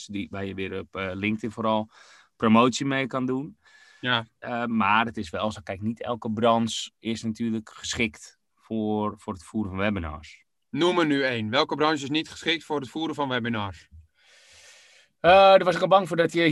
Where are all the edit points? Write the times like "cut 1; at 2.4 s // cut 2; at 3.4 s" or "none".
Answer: cut 1; at 4.4 s